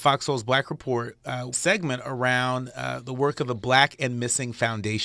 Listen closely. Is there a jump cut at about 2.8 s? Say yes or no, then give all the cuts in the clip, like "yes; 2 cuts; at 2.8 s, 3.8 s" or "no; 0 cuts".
no; 1 cut; at 1.5 s